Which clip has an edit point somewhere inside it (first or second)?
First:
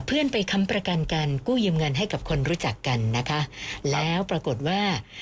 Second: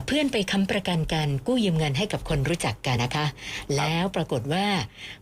second